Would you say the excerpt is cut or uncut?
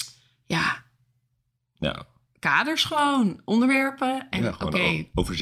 uncut